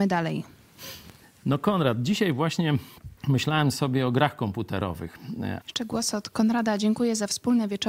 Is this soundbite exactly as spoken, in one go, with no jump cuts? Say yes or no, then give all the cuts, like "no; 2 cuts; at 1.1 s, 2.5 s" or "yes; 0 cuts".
no; 2 cuts; at 3.2 s, 5.6 s